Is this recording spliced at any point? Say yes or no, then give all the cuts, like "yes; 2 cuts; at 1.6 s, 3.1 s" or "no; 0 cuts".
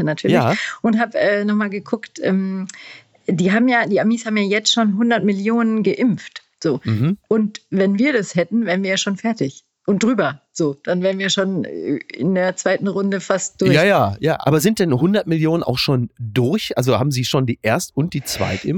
yes; 1 cut; at 7.2 s